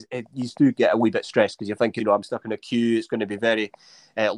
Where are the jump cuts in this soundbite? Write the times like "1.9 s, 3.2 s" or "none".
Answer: 2.0 s